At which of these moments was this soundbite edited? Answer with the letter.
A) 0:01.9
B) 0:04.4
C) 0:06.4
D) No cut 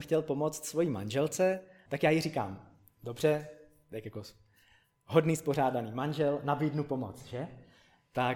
A